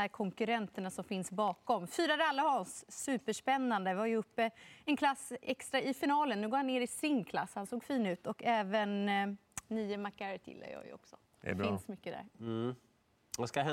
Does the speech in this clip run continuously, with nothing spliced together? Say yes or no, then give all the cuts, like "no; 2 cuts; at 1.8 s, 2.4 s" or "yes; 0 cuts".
no; 1 cut; at 12.3 s